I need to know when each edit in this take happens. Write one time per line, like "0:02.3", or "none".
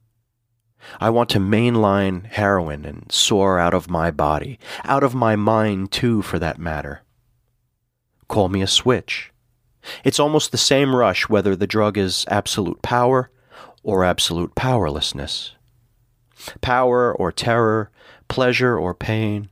none